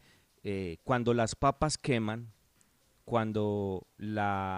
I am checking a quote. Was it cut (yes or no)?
no